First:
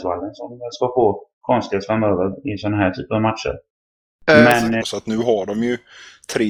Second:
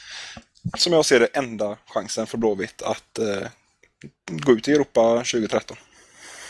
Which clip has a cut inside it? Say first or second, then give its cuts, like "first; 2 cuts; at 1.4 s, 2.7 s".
first; 1 cut; at 4.8 s